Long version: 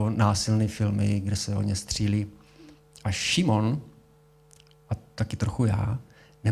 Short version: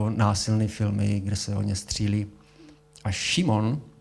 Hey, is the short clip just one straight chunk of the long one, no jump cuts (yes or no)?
yes